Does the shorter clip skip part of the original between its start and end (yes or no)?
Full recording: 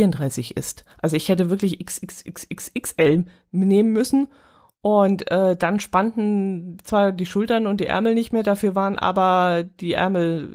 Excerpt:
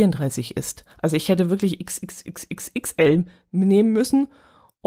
no